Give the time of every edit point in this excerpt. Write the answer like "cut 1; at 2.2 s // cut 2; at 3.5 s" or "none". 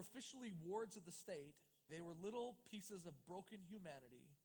cut 1; at 1.9 s